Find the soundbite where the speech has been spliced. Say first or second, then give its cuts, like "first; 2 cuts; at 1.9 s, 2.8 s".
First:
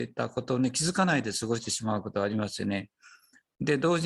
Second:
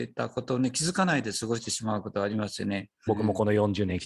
second; 1 cut; at 3.1 s